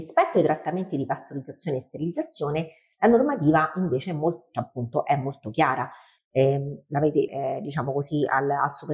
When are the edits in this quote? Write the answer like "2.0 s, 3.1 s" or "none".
6.2 s, 7.3 s

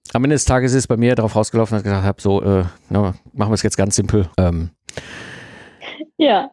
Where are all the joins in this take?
4.3 s

